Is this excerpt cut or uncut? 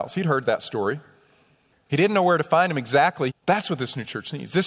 cut